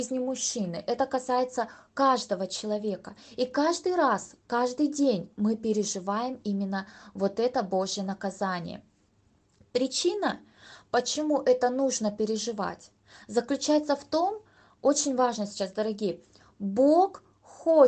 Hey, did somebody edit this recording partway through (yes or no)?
no